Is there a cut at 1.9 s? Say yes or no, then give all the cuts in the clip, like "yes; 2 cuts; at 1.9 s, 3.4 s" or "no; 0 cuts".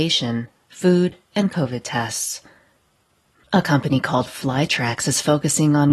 no; 1 cut; at 3.4 s